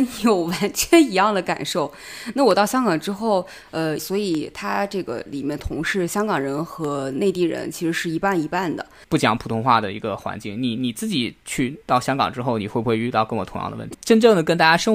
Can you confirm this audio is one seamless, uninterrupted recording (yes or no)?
no